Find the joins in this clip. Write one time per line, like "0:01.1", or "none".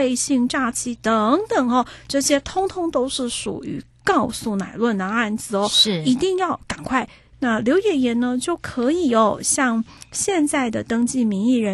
0:07.3